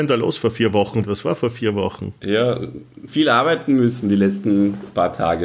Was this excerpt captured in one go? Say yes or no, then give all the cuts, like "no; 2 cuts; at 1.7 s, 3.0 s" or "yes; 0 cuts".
no; 2 cuts; at 1.0 s, 3.1 s